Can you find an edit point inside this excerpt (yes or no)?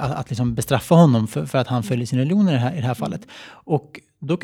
no